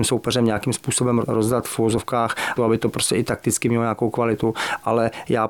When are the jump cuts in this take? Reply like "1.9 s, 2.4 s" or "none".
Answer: 1.2 s, 2.6 s